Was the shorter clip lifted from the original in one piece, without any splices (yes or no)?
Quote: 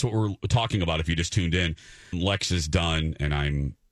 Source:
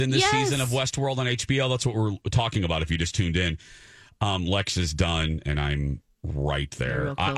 no